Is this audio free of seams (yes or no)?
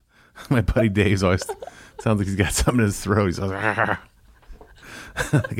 yes